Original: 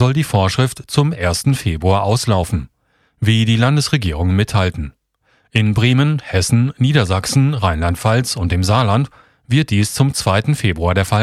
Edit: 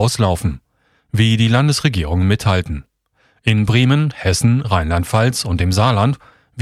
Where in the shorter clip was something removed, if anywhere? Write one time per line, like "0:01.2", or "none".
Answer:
0:04.6